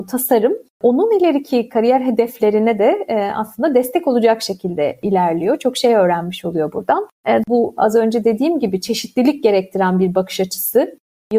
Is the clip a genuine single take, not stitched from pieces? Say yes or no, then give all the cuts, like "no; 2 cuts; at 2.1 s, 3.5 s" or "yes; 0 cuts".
no; 1 cut; at 7.4 s